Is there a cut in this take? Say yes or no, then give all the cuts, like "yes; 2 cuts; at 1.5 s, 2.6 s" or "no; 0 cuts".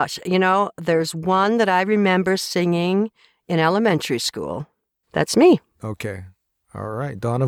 yes; 1 cut; at 5.0 s